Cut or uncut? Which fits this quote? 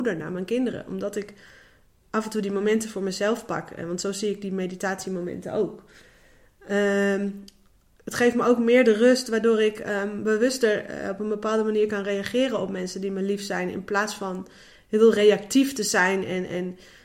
uncut